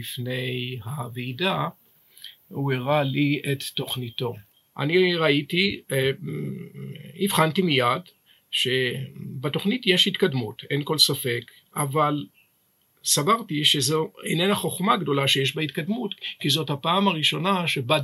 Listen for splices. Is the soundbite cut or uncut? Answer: uncut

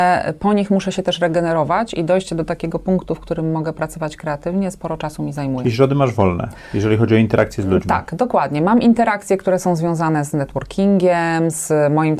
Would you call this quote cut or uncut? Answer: uncut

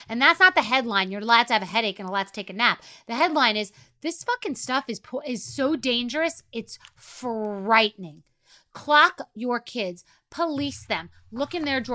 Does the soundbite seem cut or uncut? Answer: uncut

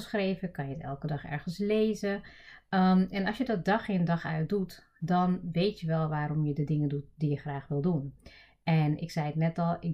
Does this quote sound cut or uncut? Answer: uncut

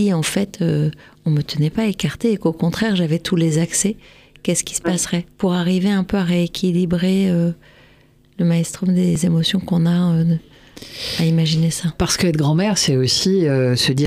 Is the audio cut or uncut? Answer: uncut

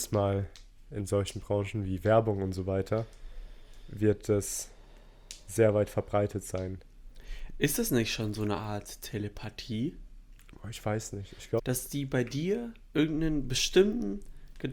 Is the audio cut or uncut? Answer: cut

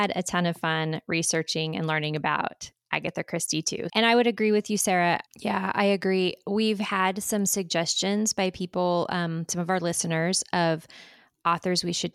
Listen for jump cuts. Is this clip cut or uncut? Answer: cut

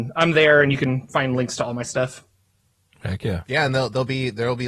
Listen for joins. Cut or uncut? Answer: uncut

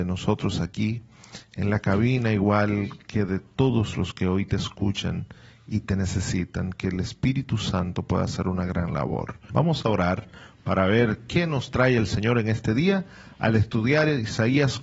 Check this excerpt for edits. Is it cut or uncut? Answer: cut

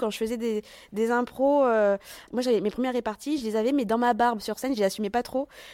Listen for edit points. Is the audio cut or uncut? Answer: uncut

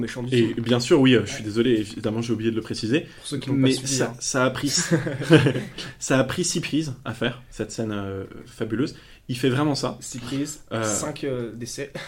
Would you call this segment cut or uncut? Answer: uncut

